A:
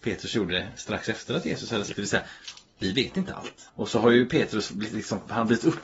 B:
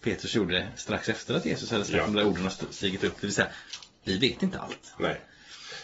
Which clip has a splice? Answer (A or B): A